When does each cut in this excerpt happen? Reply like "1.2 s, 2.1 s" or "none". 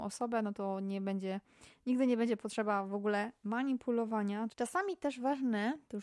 4.5 s